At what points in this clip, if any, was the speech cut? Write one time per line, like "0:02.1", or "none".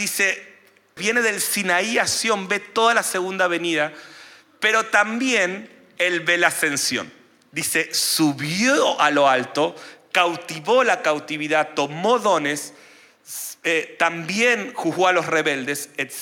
0:01.0